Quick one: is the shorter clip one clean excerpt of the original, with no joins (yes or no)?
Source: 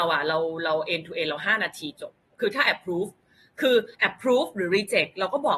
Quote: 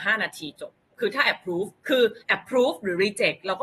no